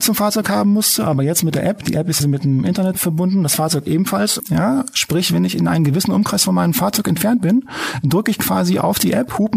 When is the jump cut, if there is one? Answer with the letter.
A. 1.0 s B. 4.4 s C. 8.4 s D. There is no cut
B